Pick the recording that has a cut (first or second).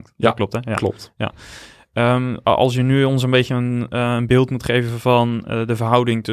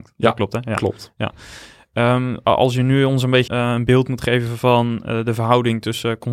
second